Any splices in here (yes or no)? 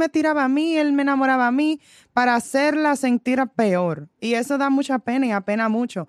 no